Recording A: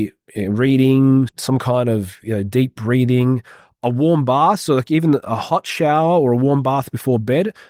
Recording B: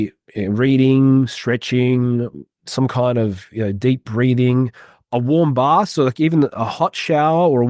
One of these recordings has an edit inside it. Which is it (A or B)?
A